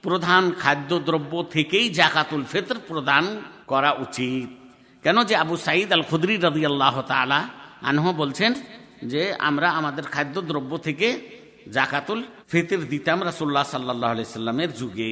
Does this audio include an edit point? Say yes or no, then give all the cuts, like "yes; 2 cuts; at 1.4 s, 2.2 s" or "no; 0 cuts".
yes; 2 cuts; at 3.6 s, 12.4 s